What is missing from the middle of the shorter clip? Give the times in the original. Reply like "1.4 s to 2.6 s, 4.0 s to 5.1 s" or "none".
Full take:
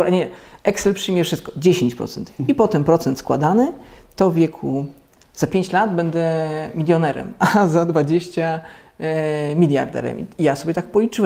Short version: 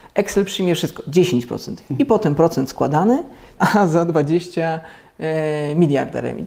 4.1 s to 7.4 s

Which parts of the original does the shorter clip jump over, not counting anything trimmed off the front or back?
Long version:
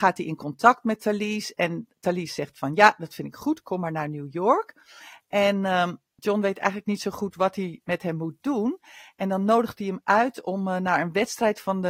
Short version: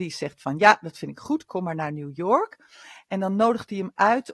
5.1 s to 9.1 s

